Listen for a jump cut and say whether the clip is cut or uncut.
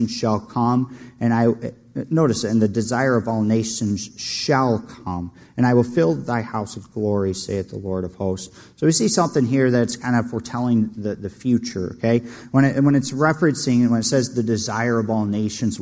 uncut